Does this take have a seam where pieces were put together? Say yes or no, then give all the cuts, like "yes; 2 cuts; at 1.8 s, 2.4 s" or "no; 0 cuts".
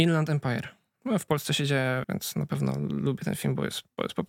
yes; 1 cut; at 2.0 s